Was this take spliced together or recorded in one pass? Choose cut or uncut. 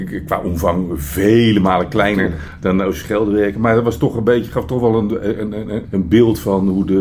cut